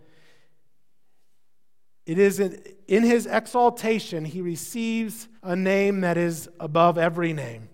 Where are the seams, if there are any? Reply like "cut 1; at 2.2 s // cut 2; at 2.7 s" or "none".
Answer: cut 1; at 2.8 s // cut 2; at 5.4 s